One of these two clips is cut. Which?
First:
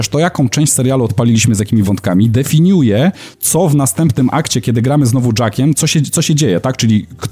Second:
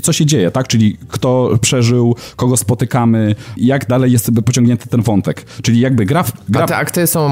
second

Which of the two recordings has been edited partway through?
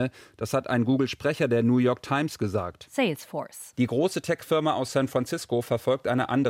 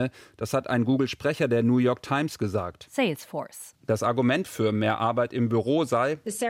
second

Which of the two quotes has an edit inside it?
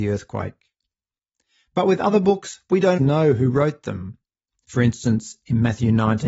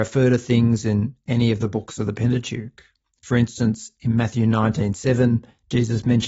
first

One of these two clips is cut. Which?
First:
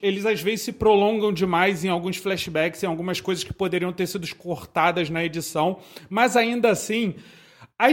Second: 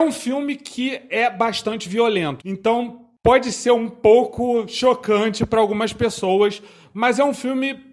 second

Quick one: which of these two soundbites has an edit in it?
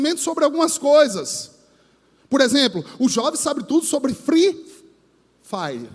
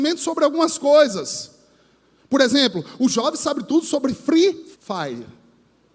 second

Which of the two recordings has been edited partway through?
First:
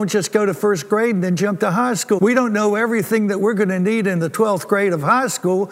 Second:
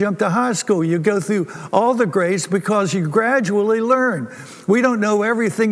first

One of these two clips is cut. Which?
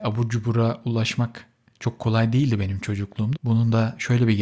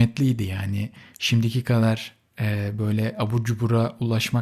first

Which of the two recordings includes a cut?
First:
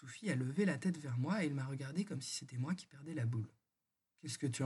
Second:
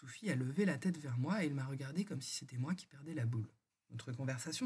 second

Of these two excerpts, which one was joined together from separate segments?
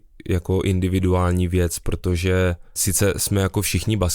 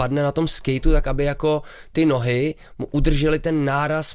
first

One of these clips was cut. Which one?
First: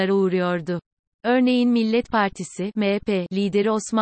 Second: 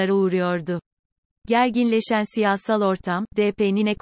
first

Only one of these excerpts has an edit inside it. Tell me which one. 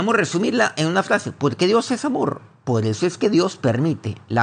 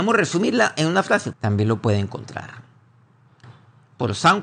second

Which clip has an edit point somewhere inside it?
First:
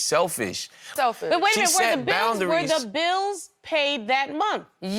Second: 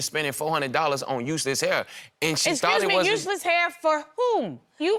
first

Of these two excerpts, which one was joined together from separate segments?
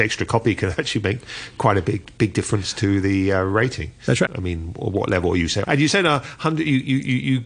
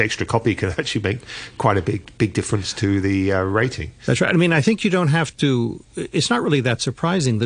first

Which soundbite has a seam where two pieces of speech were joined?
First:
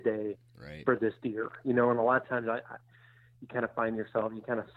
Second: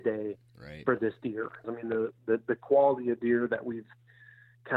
second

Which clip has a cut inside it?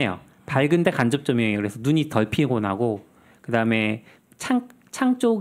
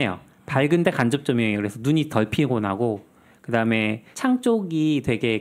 second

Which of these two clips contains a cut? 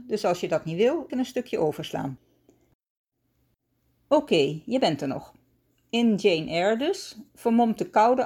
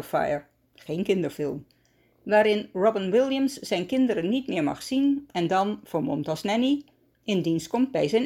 first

